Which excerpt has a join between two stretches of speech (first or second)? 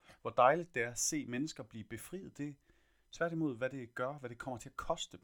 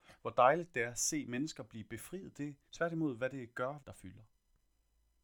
second